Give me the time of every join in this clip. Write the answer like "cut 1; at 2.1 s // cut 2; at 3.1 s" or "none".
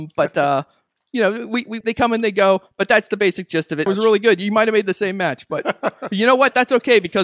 cut 1; at 1.8 s // cut 2; at 3.9 s